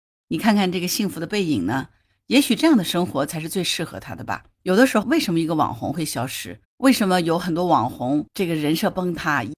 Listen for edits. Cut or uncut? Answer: cut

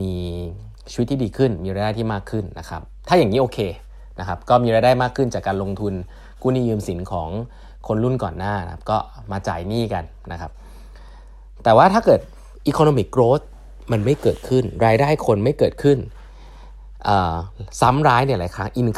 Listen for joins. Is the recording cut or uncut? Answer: uncut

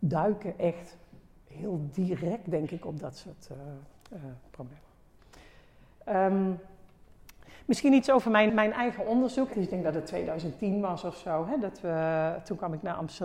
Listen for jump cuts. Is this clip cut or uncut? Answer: cut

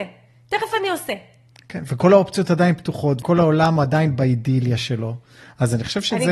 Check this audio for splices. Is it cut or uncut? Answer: cut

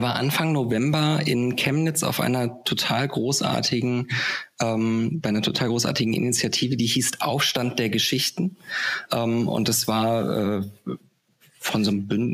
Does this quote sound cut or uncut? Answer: uncut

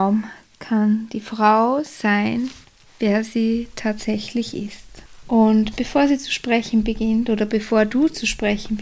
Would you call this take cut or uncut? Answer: cut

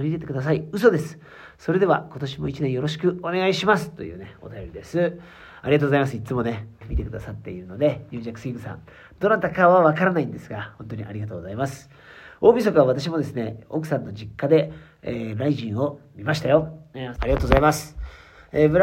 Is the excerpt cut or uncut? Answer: cut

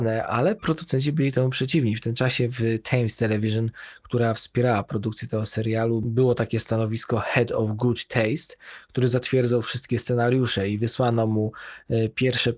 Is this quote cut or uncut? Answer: uncut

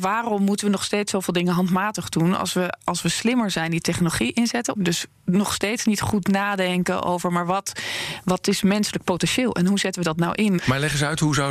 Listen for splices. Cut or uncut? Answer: cut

